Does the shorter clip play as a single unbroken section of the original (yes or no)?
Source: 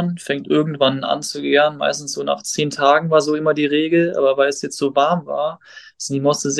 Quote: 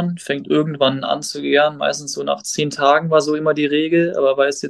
yes